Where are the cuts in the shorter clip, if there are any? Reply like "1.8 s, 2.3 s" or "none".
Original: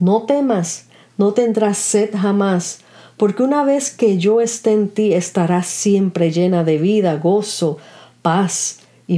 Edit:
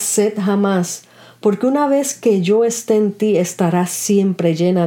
none